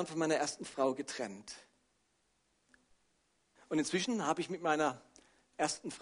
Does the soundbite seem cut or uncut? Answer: uncut